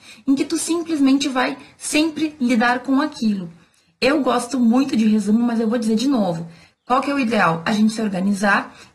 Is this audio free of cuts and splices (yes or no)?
no